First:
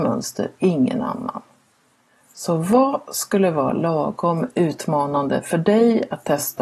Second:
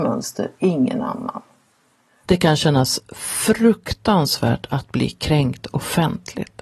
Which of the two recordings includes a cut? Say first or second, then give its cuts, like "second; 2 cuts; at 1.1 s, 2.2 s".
second; 1 cut; at 2.2 s